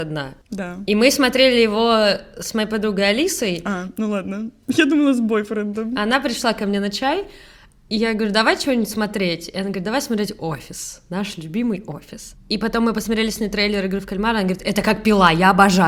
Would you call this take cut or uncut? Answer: uncut